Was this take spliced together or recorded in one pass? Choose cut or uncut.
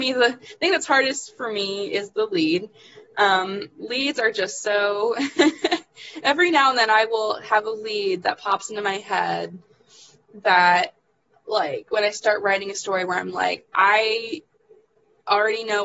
uncut